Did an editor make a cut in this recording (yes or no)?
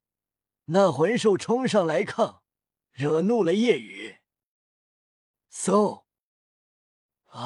no